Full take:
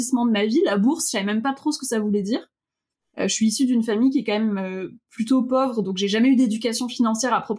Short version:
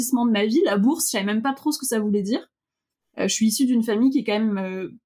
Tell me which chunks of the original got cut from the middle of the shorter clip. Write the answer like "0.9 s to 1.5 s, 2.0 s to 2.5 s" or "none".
none